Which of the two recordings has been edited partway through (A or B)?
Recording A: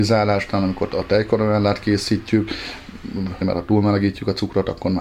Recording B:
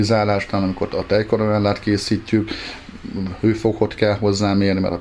A